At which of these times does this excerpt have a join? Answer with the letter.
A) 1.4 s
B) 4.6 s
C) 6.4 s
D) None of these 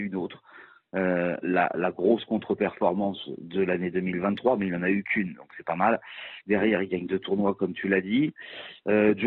C